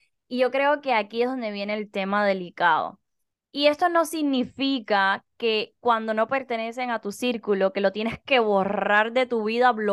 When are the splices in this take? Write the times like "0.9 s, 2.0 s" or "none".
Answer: none

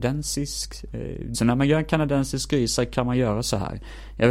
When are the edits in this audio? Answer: 1.3 s

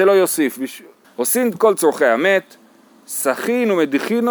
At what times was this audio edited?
1.0 s

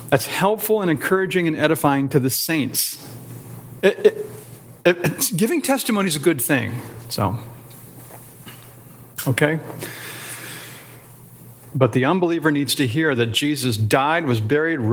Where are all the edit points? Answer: 3.8 s, 7.1 s, 11.7 s

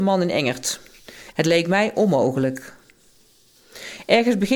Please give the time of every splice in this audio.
1.3 s

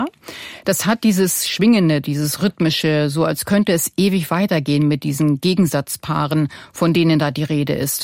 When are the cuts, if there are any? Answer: none

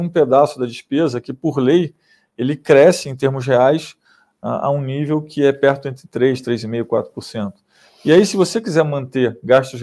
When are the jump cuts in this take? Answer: none

